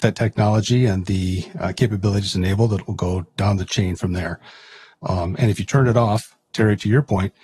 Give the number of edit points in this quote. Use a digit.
1